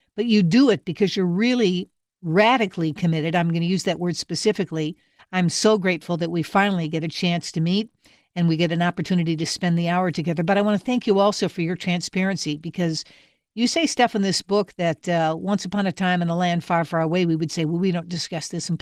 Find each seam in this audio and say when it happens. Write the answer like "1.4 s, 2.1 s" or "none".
5.2 s